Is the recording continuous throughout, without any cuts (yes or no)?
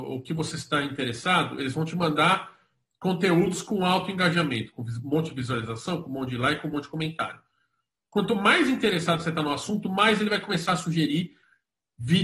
yes